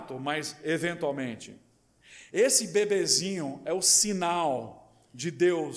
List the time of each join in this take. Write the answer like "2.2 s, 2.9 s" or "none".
none